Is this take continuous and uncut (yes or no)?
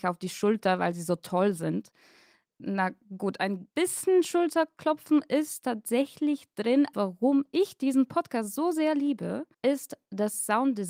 no